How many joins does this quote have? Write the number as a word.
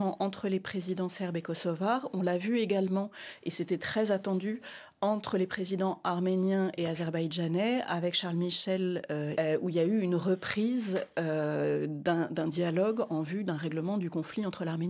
one